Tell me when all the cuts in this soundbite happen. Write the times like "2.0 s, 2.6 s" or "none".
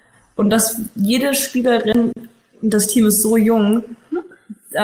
none

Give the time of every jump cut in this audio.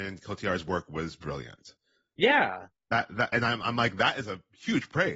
none

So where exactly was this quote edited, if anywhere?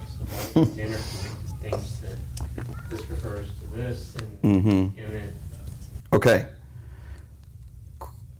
6.0 s

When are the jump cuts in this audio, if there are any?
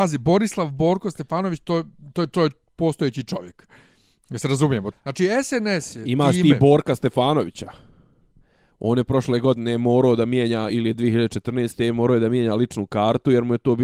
4.9 s, 10.7 s

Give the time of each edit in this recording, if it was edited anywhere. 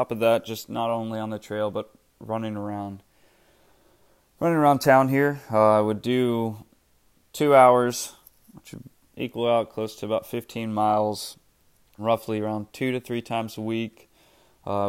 12.0 s

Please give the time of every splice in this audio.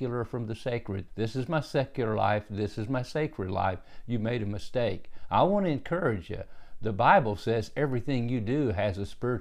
1.1 s

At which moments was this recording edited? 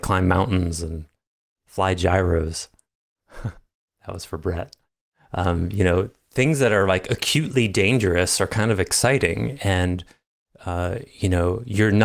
none

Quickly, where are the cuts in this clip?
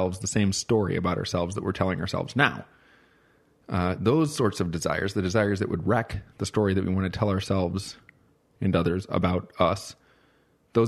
none

